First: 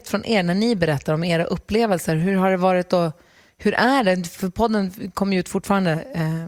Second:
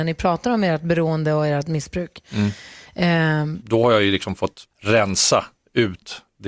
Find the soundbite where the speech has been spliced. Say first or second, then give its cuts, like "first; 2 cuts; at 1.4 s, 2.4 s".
second; 2 cuts; at 3.6 s, 4.7 s